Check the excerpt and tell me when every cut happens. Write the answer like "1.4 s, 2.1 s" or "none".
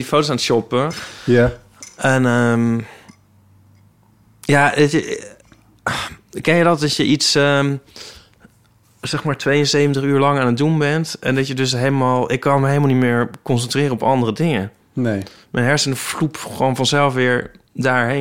none